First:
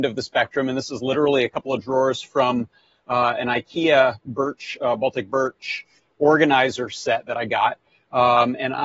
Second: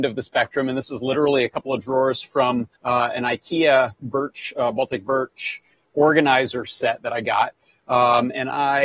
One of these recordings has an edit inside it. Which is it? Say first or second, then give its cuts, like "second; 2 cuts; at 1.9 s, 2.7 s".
second; 1 cut; at 2.8 s